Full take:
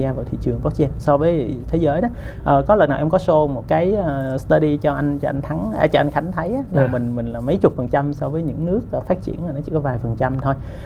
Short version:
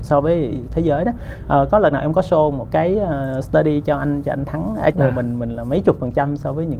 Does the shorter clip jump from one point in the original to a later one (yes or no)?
yes